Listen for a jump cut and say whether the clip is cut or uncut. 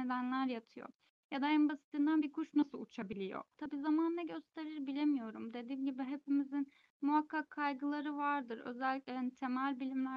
cut